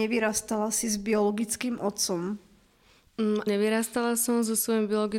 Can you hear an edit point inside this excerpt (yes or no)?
yes